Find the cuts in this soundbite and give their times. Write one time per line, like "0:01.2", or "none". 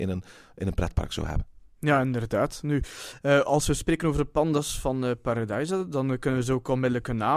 none